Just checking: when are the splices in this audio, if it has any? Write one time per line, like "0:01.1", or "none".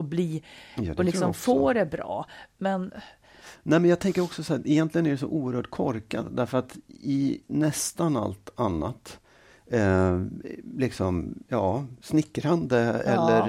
none